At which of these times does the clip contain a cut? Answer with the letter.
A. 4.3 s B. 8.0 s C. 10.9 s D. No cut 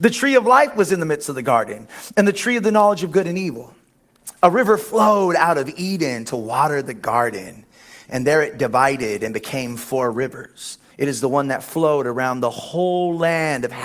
C